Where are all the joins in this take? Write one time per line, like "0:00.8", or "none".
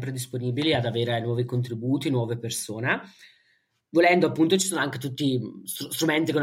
none